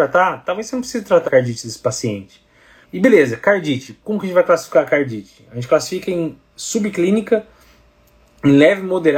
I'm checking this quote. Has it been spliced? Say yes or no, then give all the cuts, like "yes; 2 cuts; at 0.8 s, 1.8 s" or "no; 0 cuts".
yes; 2 cuts; at 1.2 s, 2.8 s